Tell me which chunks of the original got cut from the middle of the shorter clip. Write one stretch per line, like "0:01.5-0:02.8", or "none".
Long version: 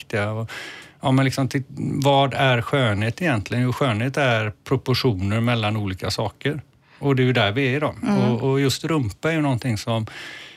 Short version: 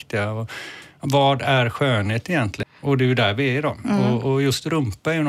0:01.0-0:02.0
0:03.5-0:06.8